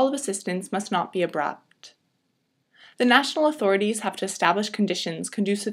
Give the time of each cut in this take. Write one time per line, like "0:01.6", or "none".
none